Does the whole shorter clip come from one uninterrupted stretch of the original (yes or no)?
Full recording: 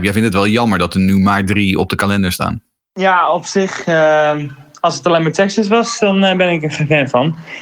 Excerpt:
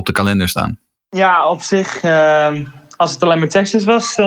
yes